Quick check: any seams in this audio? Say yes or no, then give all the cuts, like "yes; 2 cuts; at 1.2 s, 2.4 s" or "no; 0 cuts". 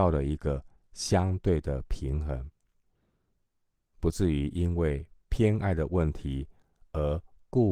no; 0 cuts